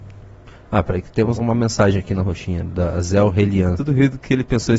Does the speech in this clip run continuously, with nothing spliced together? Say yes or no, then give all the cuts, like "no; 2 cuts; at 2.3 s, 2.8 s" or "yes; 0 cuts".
no; 2 cuts; at 1.4 s, 3.8 s